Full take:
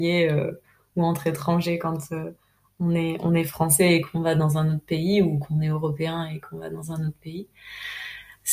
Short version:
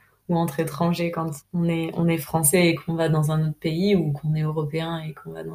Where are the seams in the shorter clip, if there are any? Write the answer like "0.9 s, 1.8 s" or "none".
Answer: 1.4 s